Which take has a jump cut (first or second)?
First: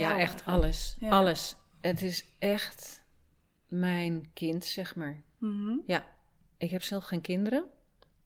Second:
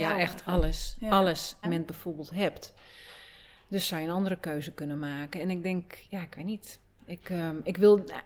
second